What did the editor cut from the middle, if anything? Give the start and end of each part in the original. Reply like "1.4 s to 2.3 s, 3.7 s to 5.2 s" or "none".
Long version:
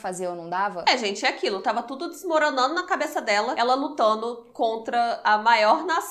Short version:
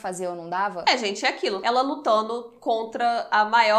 1.6 s to 3.6 s